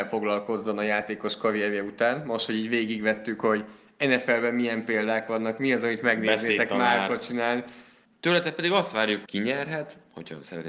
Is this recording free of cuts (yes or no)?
no